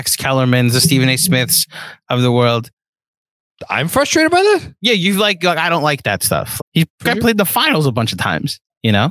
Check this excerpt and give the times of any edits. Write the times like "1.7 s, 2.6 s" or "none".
6.6 s